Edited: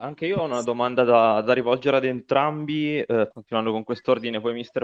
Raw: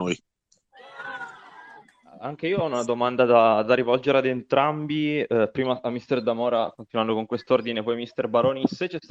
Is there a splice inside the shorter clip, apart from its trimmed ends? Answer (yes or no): yes